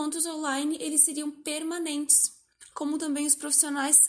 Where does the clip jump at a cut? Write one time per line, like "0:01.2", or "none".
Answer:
0:02.7